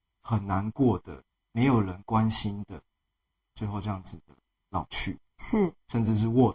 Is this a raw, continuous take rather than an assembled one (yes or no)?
yes